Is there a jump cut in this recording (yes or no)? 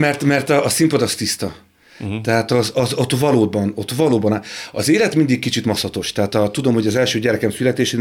no